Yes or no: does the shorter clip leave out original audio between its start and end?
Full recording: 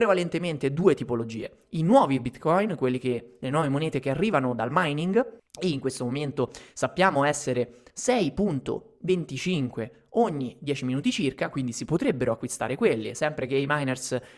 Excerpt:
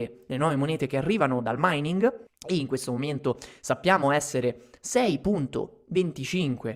no